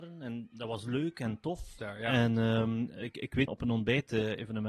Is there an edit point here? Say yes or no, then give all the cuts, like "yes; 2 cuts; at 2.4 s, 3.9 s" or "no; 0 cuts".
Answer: yes; 2 cuts; at 1.8 s, 3.5 s